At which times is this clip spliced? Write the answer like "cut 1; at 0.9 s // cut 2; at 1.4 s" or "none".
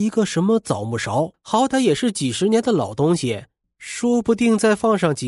cut 1; at 1.3 s // cut 2; at 3.6 s

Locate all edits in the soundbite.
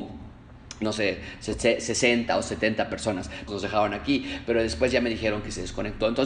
cut 1; at 3.5 s

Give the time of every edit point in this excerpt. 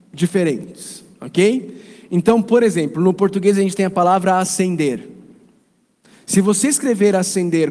none

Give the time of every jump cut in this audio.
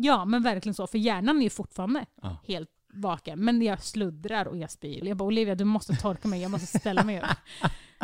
cut 1; at 5.0 s

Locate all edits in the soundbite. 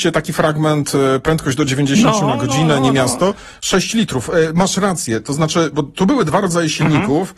cut 1; at 5.7 s

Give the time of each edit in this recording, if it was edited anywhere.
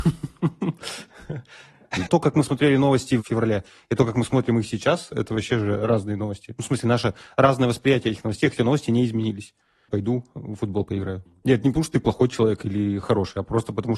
cut 1; at 2.1 s // cut 2; at 9.9 s

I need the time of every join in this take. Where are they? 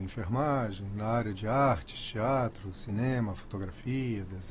none

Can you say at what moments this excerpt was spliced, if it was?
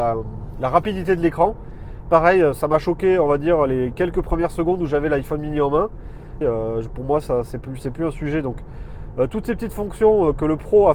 cut 1; at 6.4 s

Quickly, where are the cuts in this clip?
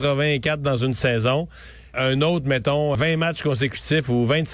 cut 1; at 1.9 s // cut 2; at 2.9 s

